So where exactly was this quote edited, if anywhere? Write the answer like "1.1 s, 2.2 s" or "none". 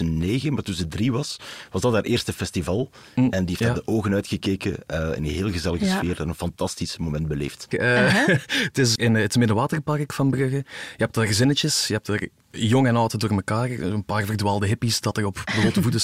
7.7 s, 8.9 s